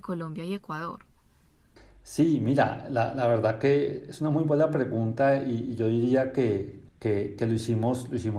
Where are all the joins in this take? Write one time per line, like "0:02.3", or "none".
0:06.9

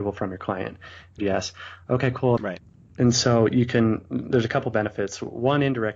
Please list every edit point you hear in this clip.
0:01.2
0:02.4

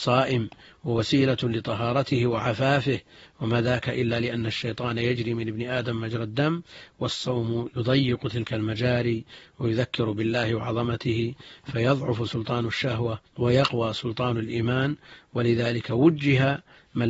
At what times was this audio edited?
0:13.3

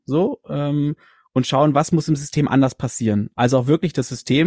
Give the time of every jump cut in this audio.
none

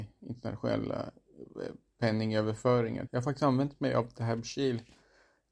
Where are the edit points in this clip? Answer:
0:03.1

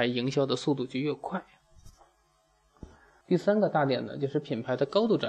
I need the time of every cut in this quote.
0:03.2

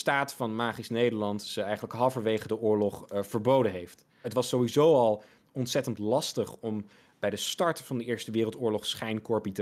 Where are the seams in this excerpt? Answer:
0:04.2

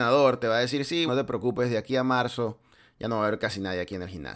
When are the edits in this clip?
0:01.1

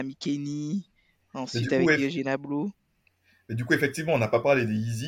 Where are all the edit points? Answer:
none

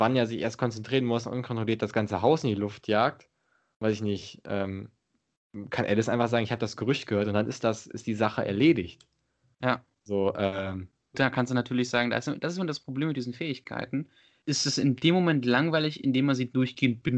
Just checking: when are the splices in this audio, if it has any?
0:11.1
0:14.4

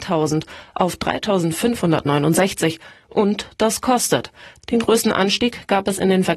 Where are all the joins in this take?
0:03.0
0:04.6

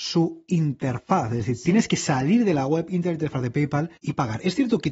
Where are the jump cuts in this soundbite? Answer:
0:04.0

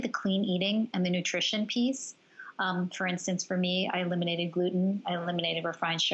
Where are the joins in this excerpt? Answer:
none

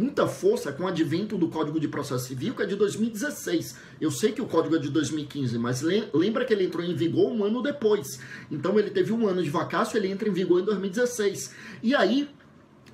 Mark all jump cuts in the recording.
none

